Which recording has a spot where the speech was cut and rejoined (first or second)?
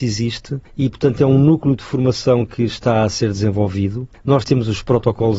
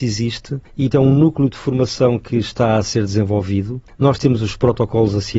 second